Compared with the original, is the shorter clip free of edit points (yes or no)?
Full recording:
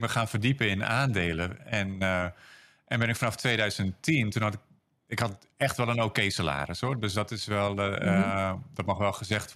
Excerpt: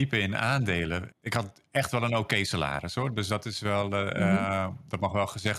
no